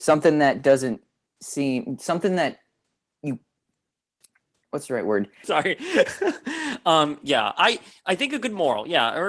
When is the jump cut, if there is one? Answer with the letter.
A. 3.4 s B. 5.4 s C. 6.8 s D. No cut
B